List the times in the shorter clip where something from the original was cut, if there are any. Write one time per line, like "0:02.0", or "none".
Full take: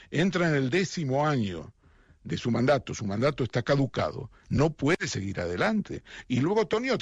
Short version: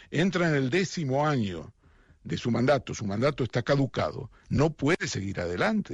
none